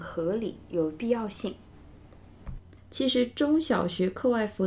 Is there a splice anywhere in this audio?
yes; 1 cut; at 2.8 s

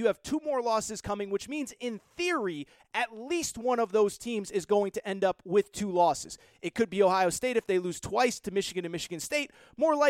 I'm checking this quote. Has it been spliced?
no; 0 cuts

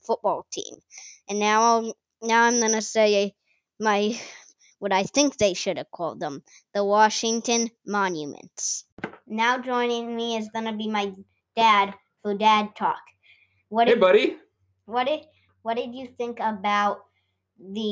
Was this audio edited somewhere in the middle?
no; 0 cuts

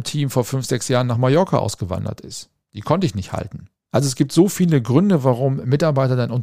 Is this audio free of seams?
no; 1 cut; at 3.9 s

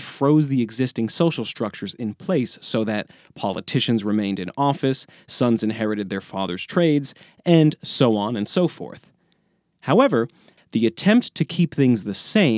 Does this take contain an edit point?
yes; 1 cut; at 10.6 s

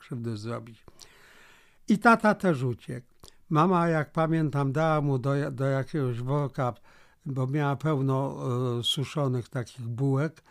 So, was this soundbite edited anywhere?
no; 0 cuts

